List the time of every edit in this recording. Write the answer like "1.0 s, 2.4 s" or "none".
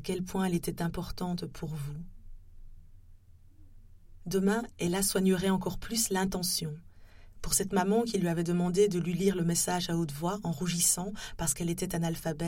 7.3 s